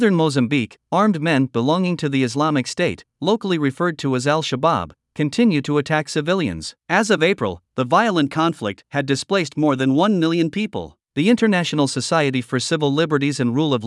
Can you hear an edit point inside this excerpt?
yes; 2 cuts; at 6.8 s, 11.1 s

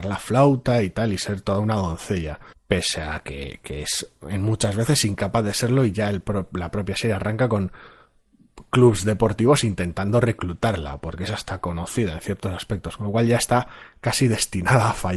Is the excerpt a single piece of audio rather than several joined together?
yes; 0 cuts

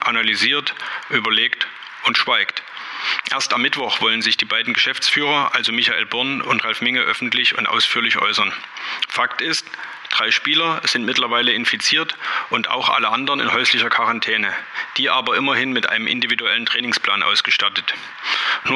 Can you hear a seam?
no; 0 cuts

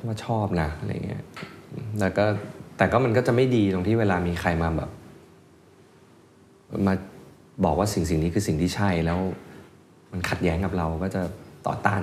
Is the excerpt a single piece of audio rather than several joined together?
yes; 0 cuts

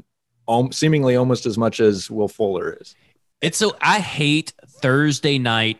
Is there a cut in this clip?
no; 0 cuts

